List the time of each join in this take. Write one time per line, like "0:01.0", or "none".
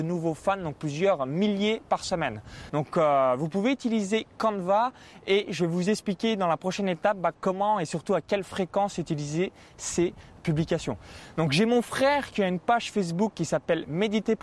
0:02.7